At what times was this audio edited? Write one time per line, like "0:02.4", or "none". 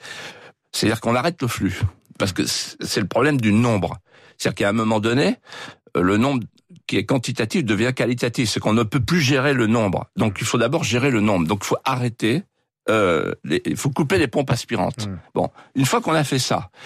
none